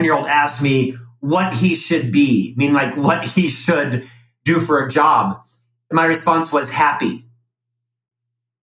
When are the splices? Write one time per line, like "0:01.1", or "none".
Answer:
none